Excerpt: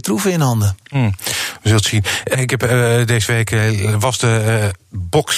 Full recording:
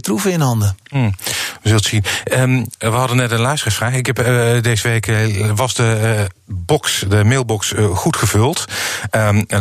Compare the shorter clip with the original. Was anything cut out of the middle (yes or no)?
yes